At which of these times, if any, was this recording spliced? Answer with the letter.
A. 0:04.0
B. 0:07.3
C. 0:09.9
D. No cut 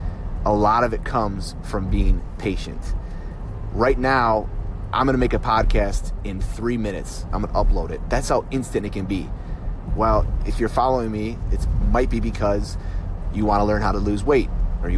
C